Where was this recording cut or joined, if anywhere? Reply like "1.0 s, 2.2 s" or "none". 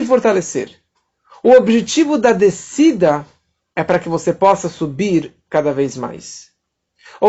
3.6 s

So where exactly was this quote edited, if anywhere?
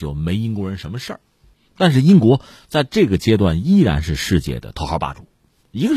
none

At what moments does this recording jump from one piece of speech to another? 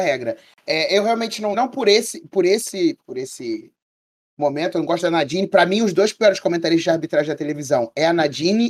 1.5 s

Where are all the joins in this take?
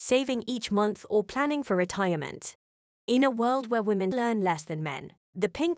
2.9 s, 4.1 s

